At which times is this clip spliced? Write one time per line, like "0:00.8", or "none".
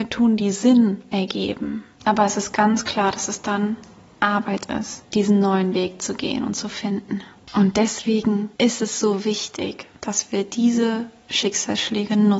0:02.0
0:05.0
0:07.4